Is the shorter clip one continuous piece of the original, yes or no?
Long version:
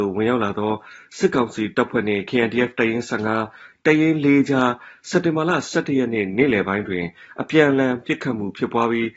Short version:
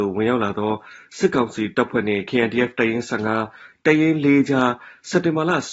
yes